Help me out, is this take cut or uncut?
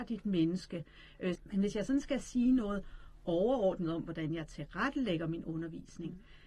cut